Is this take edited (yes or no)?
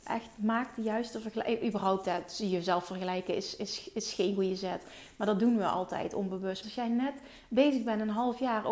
yes